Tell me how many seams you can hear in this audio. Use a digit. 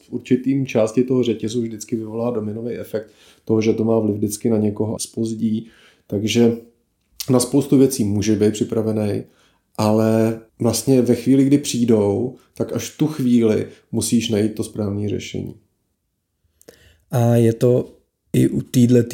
2